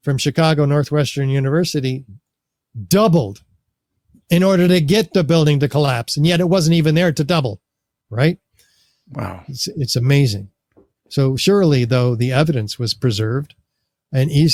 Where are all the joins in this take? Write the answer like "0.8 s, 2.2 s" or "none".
none